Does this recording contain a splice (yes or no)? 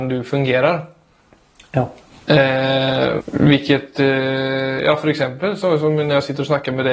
yes